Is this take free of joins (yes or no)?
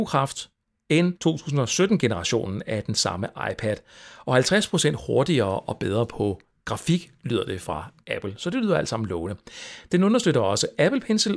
no